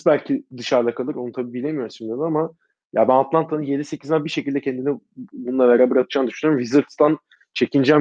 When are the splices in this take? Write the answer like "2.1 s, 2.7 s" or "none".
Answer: none